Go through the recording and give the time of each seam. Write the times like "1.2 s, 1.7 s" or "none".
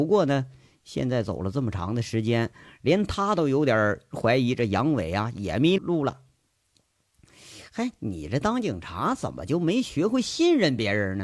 5.8 s